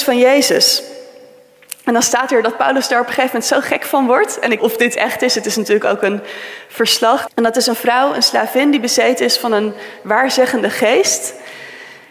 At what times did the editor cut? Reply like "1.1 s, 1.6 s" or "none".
4.6 s, 7.3 s